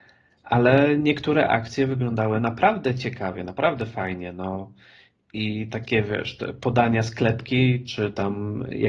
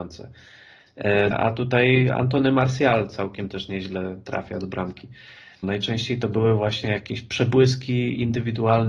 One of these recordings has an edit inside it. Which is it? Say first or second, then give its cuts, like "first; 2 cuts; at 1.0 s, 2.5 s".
second; 2 cuts; at 1.3 s, 5.6 s